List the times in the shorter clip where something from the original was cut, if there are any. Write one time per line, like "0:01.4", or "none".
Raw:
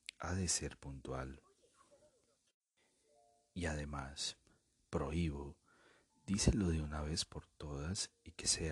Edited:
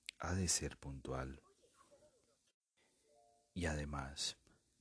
none